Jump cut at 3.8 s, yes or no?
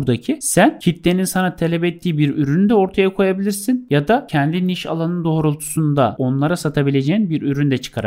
no